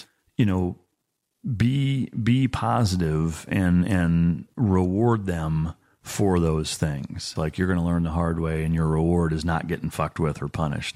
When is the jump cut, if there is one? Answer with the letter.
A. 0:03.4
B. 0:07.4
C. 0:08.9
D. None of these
B